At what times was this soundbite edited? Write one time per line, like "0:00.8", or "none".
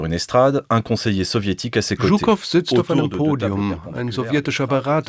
none